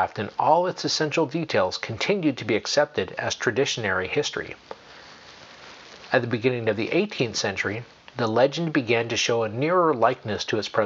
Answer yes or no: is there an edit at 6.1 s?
no